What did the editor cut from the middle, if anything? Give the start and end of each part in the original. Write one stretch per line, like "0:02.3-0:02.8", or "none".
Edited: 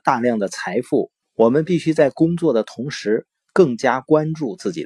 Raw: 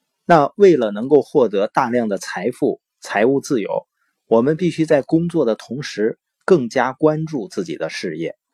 0:02.9-0:04.1